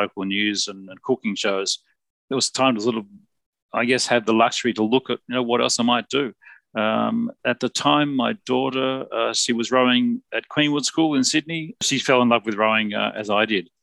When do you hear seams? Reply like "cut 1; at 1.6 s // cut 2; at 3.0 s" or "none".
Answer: none